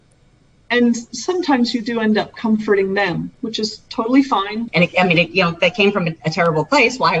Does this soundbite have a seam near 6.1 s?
no; 1 cut; at 4.7 s

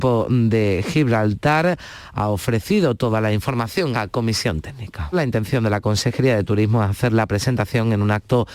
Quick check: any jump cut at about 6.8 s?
no; 2 cuts; at 3.9 s, 5.1 s

